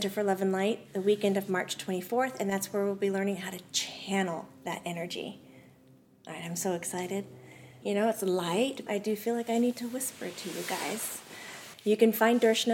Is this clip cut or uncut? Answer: cut